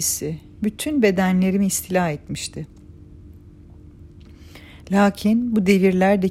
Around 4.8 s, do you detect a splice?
yes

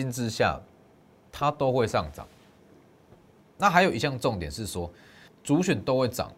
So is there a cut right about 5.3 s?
yes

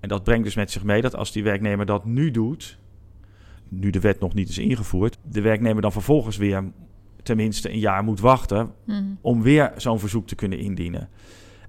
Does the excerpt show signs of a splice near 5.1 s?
yes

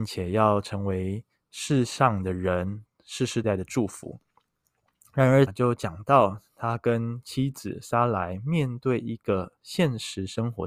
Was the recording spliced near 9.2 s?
no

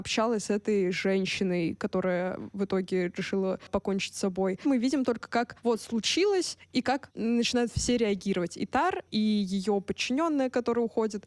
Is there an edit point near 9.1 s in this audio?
yes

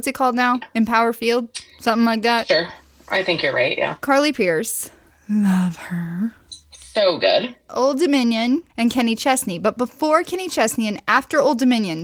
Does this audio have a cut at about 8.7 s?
yes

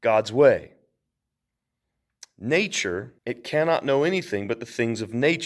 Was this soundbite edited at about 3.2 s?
yes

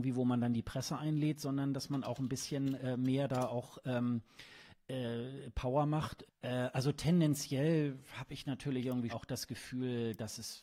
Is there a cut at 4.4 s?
no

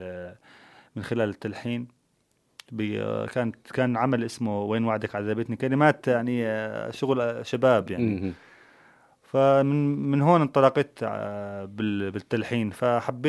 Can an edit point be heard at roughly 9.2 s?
no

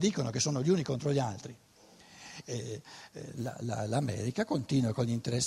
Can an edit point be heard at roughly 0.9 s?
no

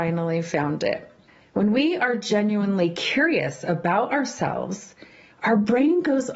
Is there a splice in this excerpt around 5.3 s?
yes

